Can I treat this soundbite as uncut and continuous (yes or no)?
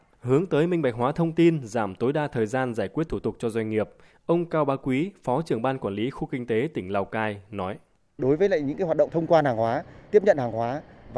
yes